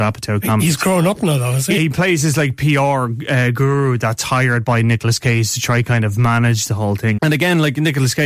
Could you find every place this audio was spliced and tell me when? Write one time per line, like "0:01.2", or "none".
0:01.8
0:07.2